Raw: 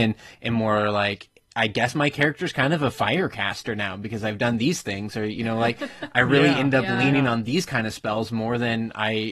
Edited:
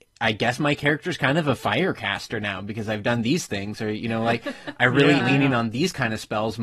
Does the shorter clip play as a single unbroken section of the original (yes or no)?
no